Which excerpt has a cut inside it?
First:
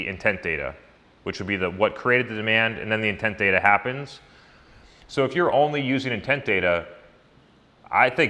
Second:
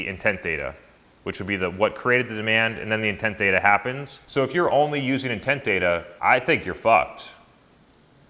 second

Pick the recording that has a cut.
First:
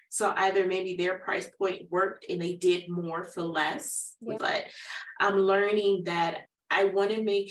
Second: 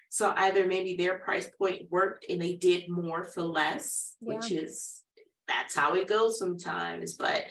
first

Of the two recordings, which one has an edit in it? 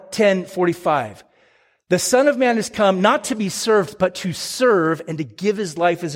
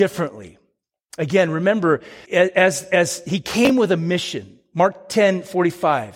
second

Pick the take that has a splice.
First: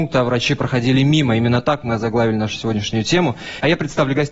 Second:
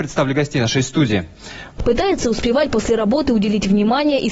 second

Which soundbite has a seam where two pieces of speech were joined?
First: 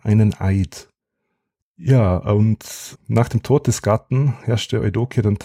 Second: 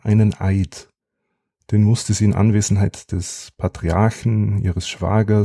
first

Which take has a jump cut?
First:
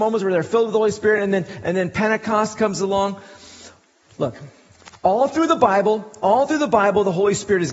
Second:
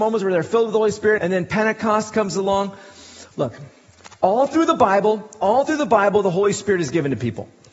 second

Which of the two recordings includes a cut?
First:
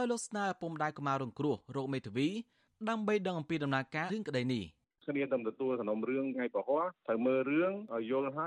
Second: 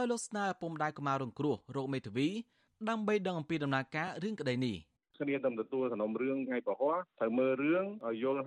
first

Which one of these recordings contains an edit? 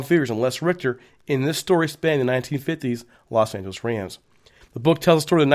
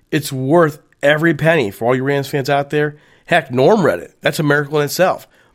first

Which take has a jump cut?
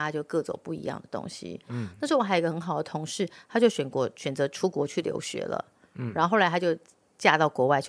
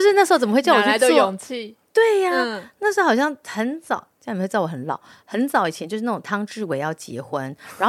first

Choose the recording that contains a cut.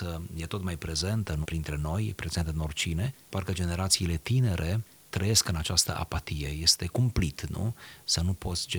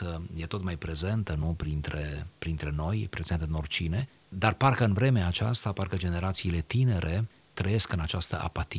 first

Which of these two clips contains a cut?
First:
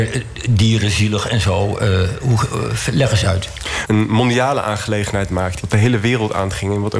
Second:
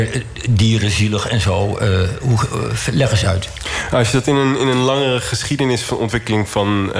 first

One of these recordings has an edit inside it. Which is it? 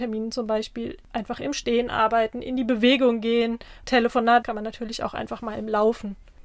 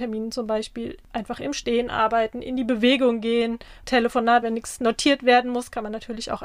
first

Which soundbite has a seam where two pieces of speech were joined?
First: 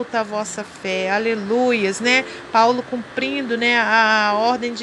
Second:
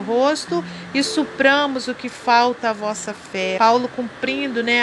second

